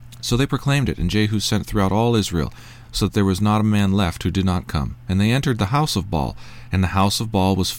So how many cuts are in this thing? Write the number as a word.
one